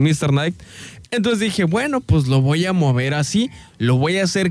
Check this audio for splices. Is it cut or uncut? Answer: cut